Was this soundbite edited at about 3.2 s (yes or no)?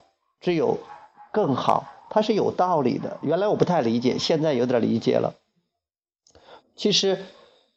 no